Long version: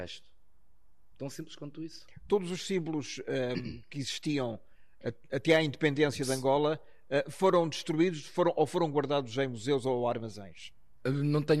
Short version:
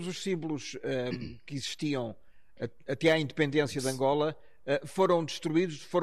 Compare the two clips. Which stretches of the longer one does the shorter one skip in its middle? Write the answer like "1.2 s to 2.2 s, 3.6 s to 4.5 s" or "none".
none